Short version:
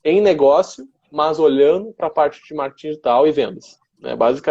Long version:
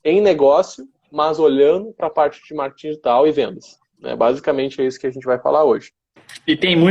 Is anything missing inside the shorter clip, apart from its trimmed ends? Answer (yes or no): no